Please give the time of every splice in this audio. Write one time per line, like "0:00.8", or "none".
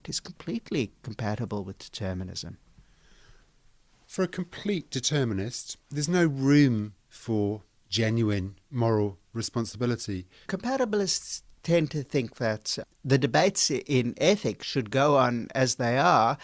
0:05.8
0:10.5